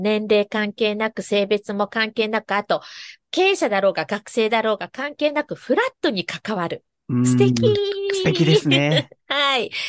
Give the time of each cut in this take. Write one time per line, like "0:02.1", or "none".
none